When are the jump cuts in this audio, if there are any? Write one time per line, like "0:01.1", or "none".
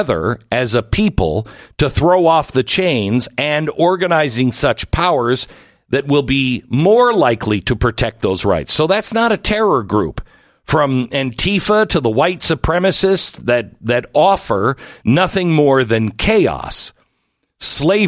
none